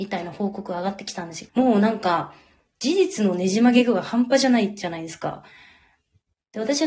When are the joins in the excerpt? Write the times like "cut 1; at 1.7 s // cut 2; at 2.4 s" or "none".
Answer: cut 1; at 1.5 s